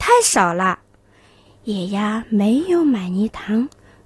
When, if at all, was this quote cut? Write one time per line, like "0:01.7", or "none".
none